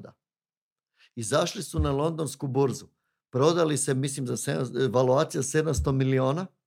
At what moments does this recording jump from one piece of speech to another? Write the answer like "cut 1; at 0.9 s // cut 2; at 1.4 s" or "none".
none